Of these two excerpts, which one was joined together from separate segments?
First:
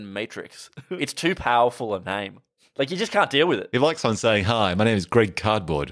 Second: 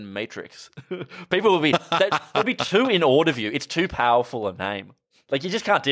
first; 1 cut; at 1.0 s

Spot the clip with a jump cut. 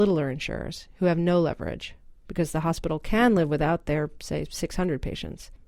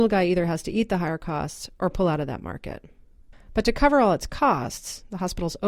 second; 1 cut; at 3.3 s

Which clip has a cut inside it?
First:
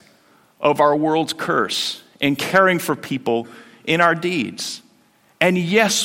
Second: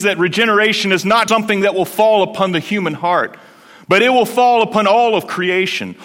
second; 1 cut; at 1.3 s

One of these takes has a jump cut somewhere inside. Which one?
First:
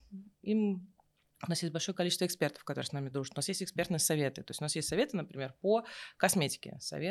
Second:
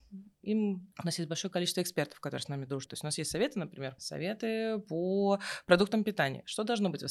second; 3 cuts; at 0.9 s, 2.9 s, 4.0 s

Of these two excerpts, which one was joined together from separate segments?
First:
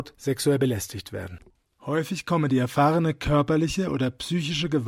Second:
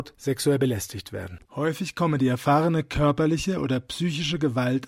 second; 1 cut; at 1.5 s

